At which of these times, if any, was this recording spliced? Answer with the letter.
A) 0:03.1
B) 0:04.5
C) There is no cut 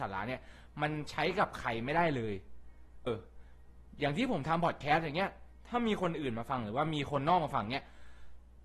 A